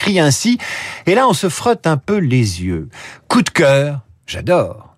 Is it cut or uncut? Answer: uncut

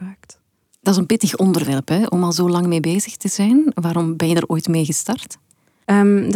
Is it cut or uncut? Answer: uncut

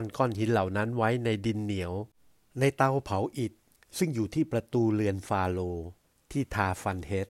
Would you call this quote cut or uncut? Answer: uncut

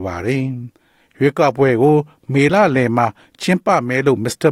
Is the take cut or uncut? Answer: uncut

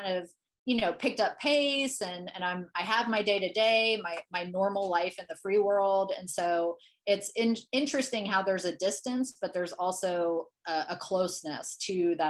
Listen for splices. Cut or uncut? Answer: uncut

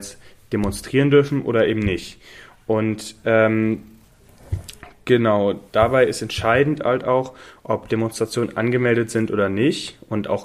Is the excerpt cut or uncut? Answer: uncut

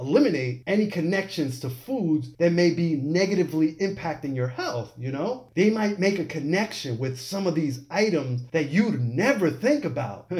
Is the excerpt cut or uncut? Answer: cut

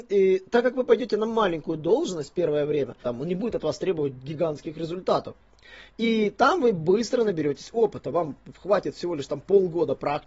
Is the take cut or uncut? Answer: cut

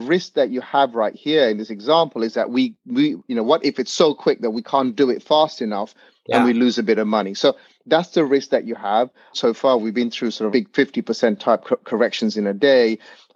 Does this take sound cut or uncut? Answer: cut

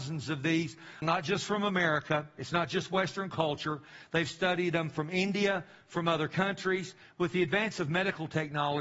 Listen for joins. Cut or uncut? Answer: cut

